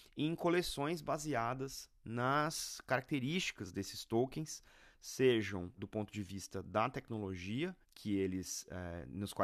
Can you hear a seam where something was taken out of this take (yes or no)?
yes